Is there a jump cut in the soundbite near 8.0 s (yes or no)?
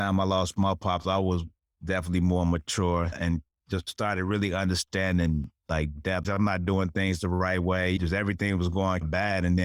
no